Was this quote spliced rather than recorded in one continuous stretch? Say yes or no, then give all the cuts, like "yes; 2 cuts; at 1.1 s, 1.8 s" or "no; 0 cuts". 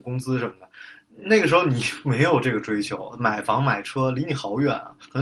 no; 0 cuts